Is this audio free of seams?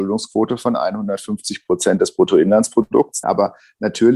no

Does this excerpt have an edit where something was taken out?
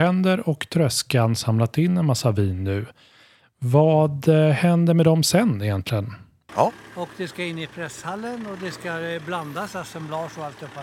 yes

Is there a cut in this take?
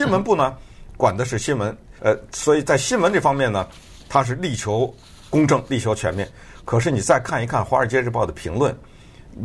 yes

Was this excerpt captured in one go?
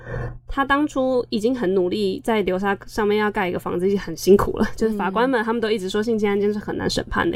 yes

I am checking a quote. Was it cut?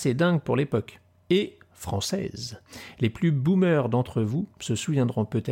no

